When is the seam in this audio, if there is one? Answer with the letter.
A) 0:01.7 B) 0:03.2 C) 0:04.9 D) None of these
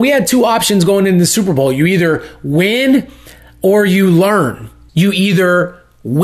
C